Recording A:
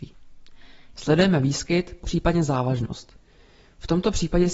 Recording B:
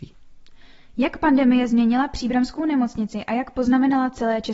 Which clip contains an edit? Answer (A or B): A